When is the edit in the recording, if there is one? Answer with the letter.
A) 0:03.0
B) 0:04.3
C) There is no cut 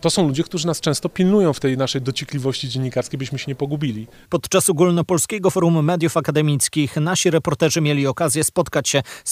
B